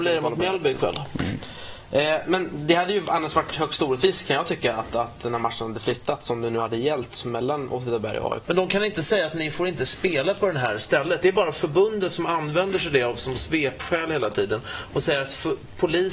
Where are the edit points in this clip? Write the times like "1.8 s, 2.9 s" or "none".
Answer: 2.2 s, 8.4 s